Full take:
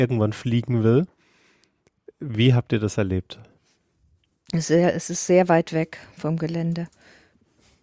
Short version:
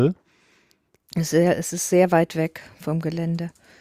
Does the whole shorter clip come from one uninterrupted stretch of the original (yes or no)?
no